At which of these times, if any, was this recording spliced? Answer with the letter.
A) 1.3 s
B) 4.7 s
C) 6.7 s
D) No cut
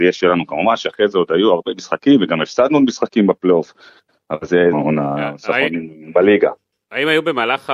B